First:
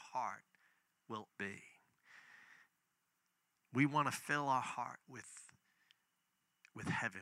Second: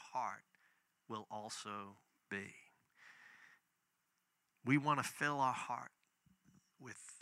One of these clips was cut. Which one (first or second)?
first